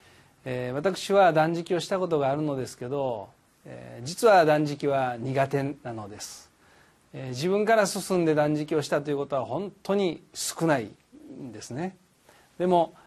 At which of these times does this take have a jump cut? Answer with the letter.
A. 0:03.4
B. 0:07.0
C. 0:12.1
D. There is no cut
D